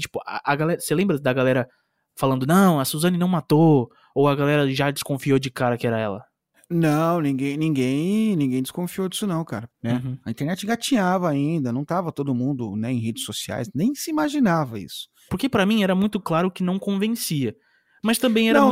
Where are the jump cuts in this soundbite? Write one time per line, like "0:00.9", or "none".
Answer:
0:09.7
0:15.3